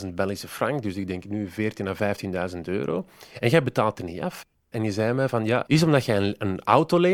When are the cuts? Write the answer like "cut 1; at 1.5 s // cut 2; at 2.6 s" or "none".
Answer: cut 1; at 4.5 s // cut 2; at 5.7 s